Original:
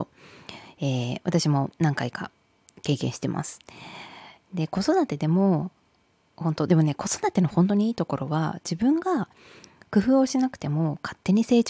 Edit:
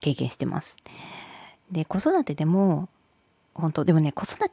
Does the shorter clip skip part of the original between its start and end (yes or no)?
no